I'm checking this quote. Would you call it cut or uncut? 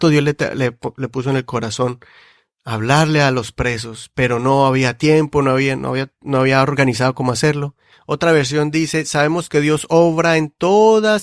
cut